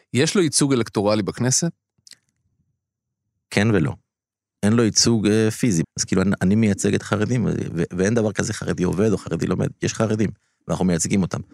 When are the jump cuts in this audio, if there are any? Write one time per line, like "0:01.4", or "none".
0:05.8